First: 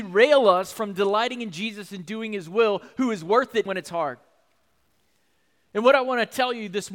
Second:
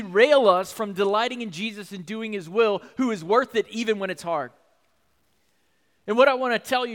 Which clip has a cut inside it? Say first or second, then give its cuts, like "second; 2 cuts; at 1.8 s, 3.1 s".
first; 1 cut; at 3.7 s